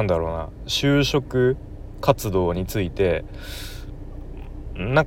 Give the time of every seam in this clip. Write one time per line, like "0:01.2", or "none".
none